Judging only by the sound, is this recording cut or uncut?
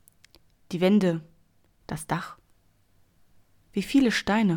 cut